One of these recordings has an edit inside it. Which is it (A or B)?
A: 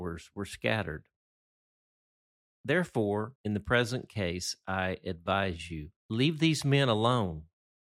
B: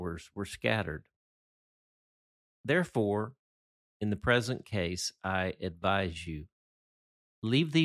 A